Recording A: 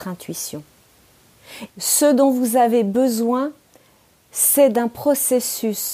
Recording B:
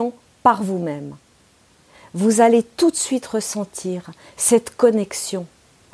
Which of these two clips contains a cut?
A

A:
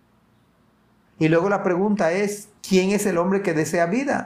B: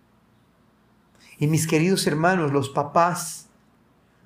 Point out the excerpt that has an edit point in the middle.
A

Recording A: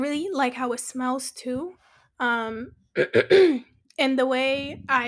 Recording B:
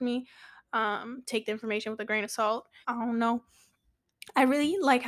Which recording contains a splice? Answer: B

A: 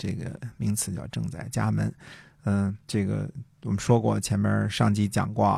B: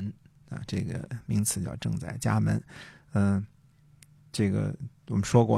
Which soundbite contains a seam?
A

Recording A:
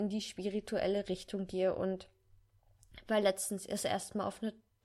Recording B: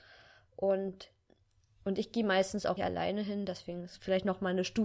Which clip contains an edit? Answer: B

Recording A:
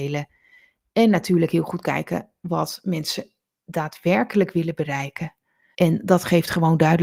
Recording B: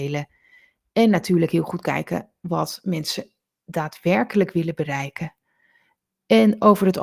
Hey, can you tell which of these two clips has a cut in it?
A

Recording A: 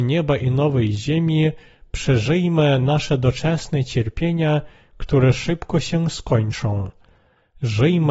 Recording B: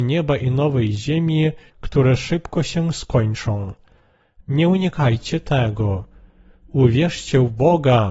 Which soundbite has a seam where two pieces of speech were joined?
B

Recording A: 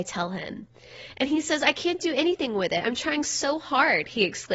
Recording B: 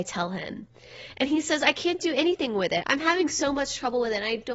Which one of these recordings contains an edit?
B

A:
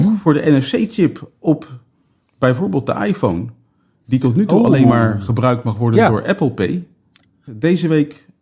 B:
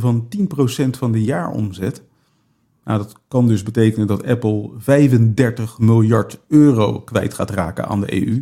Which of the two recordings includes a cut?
A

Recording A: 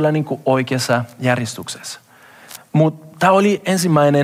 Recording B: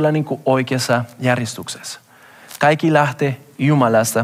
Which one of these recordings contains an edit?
A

